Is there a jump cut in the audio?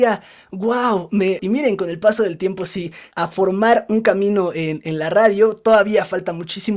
yes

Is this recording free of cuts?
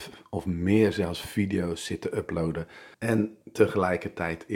no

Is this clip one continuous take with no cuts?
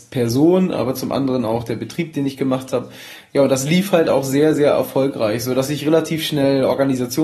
yes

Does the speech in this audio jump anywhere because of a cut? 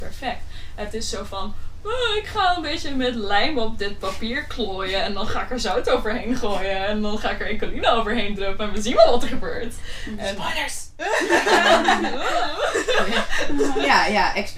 no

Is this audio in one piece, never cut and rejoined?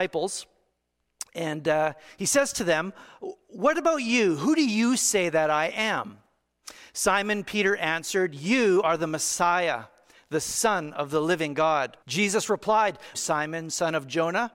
no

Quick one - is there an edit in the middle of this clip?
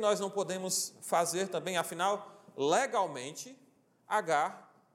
no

